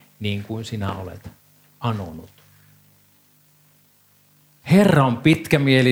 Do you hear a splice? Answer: yes; 1 cut; at 4.6 s

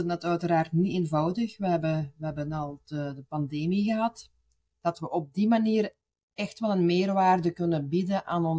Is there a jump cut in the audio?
yes; 1 cut; at 4.7 s

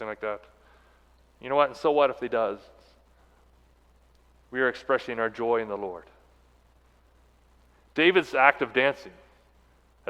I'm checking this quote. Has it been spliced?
no; 0 cuts

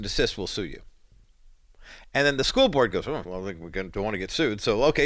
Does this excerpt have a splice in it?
yes; 1 cut; at 3.3 s

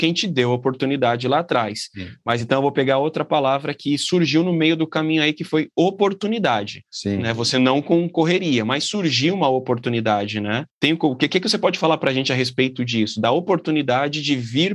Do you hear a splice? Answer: no; 0 cuts

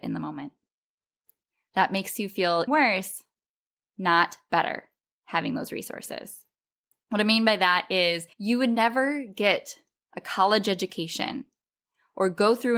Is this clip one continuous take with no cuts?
no; 3 cuts; at 2.7 s, 6.9 s, 8.3 s

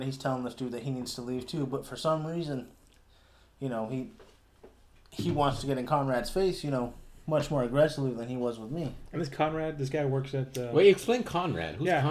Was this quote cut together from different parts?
no; 0 cuts

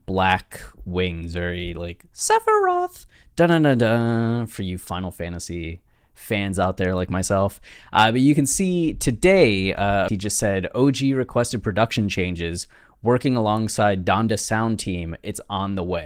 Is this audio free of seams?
no; 1 cut; at 10.1 s

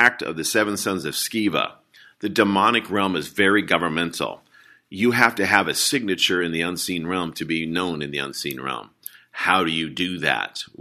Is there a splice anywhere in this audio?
no; 0 cuts

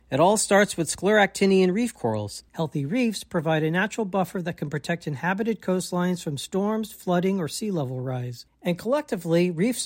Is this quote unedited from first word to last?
no; 1 cut; at 2.5 s

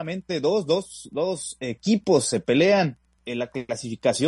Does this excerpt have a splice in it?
yes; 1 cut; at 3.2 s

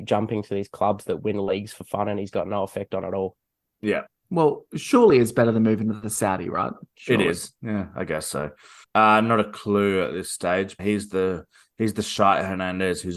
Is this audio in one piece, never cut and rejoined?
no; 2 cuts; at 8.8 s, 10.8 s

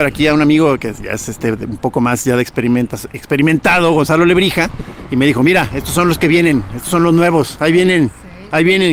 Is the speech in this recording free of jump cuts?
yes; 0 cuts

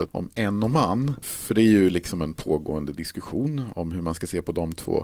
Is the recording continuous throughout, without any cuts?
yes; 0 cuts

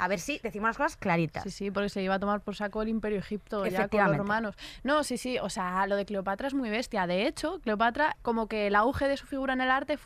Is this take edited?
yes; 1 cut; at 8.1 s

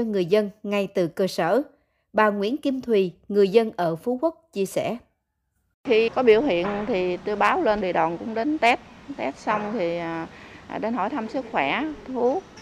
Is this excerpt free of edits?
no; 1 cut; at 6.1 s

